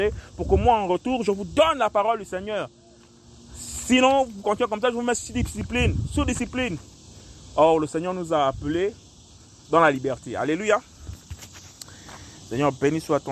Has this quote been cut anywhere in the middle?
no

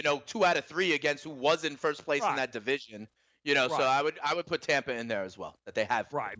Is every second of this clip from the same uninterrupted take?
yes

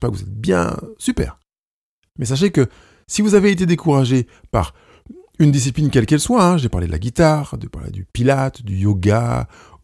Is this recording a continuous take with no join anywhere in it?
yes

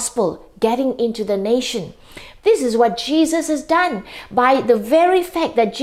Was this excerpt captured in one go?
no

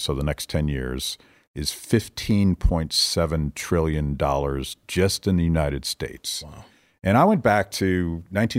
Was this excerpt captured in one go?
no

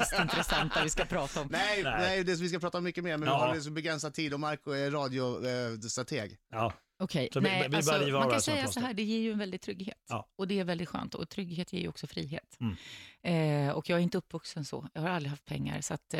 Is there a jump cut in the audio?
no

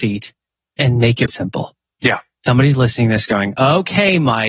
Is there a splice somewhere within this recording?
yes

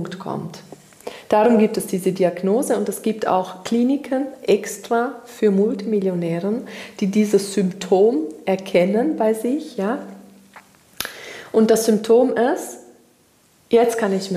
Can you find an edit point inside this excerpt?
no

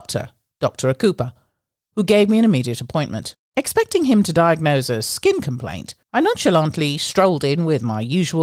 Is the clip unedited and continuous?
no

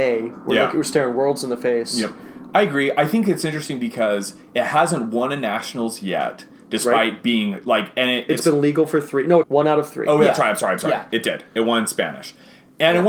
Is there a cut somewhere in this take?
yes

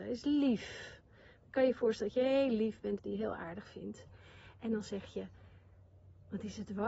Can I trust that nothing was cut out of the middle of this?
no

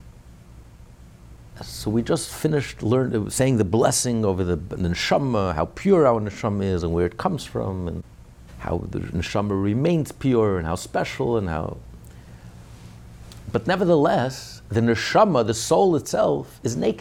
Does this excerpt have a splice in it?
no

